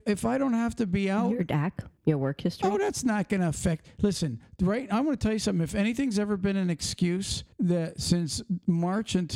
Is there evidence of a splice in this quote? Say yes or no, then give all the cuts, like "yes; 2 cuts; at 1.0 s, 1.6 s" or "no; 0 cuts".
yes; 2 cuts; at 2.0 s, 7.5 s